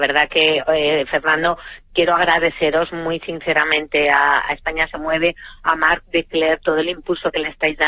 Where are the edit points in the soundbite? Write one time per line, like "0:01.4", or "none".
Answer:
none